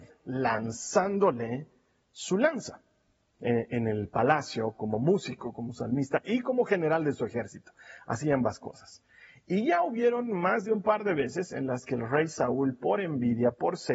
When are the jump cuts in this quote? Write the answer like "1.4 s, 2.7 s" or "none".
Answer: 3.3 s

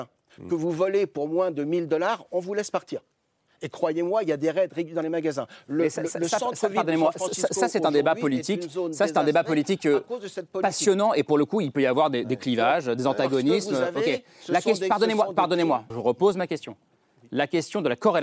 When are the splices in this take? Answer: 15.9 s

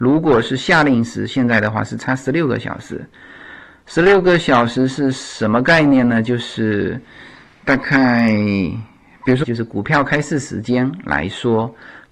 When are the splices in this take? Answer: 9.4 s

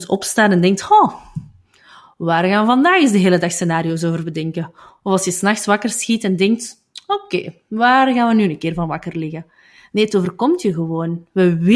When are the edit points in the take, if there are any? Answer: none

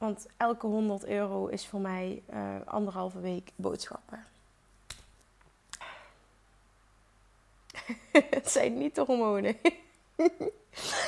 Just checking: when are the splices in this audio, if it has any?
5.8 s

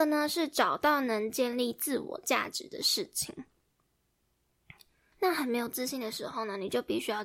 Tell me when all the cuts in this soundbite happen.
5.1 s

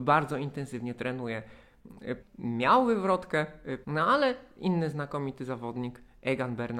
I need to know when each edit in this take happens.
2.2 s, 3.8 s

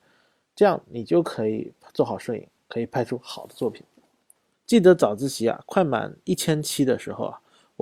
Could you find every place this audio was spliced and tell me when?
4.5 s

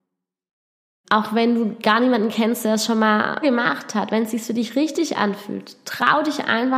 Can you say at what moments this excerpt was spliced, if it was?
1.0 s, 3.4 s

